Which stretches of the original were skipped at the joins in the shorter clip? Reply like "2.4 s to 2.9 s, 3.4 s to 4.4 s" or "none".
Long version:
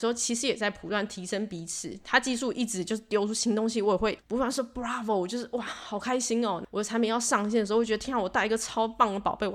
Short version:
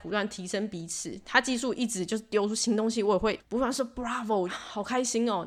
5.3 s to 5.6 s